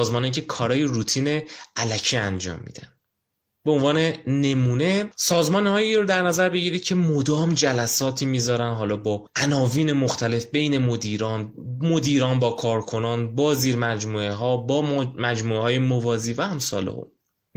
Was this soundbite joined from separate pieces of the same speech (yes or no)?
no